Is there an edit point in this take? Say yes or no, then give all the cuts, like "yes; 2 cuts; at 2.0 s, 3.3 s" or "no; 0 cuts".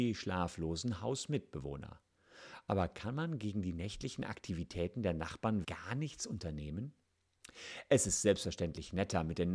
yes; 1 cut; at 5.6 s